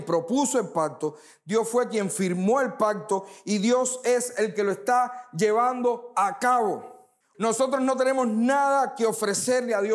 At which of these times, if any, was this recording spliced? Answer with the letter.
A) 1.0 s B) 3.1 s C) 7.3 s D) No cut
C